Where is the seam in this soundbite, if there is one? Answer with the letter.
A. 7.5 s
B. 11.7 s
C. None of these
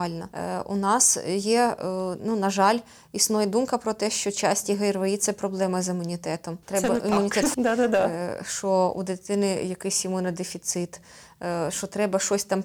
A